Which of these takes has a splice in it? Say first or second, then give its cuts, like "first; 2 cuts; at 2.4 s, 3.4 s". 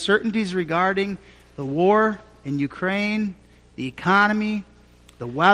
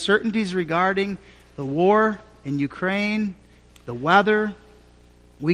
second; 1 cut; at 3.7 s